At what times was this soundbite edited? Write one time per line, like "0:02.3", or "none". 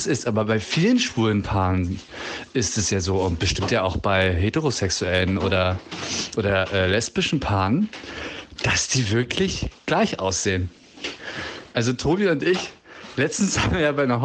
none